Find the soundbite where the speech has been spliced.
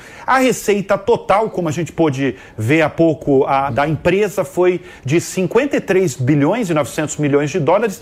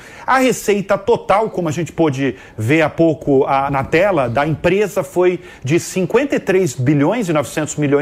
first; 1 cut; at 3.7 s

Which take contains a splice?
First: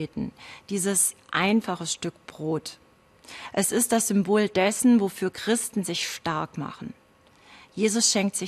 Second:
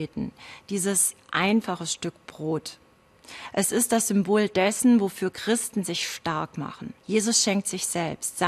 second; 1 cut; at 7.0 s

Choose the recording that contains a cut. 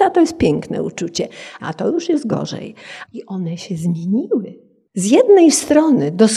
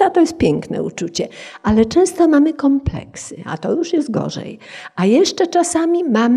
first; 3 cuts; at 1.6 s, 3.1 s, 4.9 s

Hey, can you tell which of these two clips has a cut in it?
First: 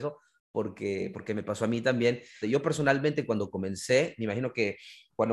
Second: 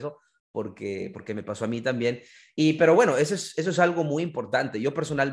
first; 1 cut; at 2.4 s

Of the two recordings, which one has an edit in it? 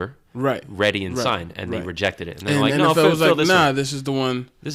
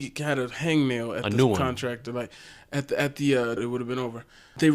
second; 1 cut; at 3.6 s

